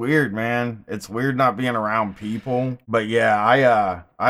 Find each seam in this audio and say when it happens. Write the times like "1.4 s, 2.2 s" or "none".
2.8 s